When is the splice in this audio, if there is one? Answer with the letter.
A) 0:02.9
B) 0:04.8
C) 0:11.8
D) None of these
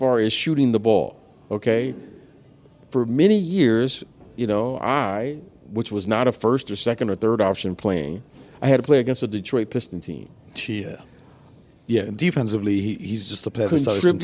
C